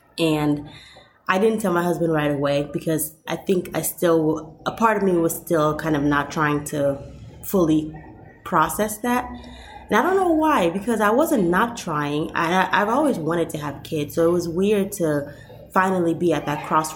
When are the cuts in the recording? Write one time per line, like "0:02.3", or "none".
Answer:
none